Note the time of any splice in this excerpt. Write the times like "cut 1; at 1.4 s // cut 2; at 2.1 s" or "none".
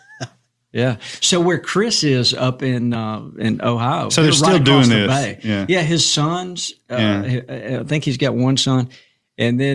none